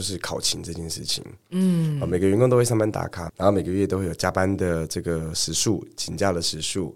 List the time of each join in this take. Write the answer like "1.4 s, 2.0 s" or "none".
3.3 s

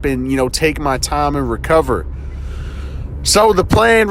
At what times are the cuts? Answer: none

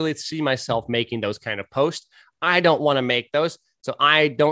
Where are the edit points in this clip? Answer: none

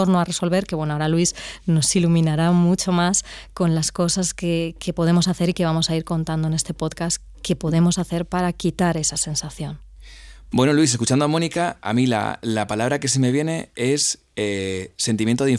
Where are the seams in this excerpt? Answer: none

